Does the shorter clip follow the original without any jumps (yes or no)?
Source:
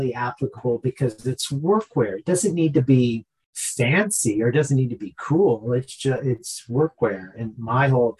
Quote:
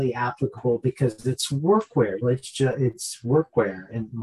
no